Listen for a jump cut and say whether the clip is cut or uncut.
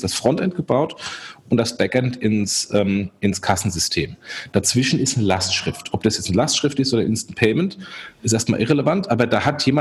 uncut